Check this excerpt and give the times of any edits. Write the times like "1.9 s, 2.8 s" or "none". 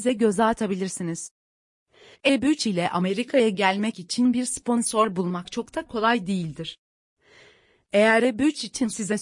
2.1 s